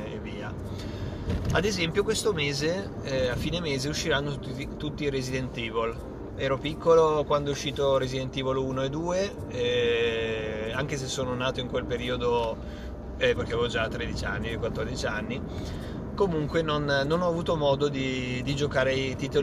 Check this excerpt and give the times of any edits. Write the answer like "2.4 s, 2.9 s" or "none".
6.3 s, 13.4 s